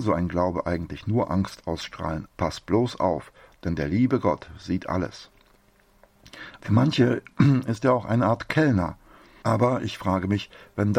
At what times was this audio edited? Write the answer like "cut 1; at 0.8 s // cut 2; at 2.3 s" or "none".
cut 1; at 2.3 s // cut 2; at 6.6 s // cut 3; at 9.4 s